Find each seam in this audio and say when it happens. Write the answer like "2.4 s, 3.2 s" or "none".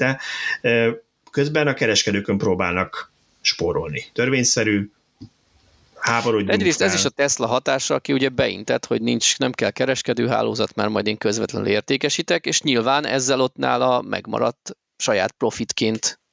4.1 s